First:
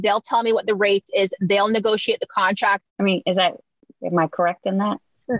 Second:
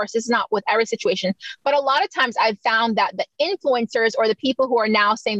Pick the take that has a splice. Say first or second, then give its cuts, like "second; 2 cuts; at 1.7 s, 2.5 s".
first; 1 cut; at 2.9 s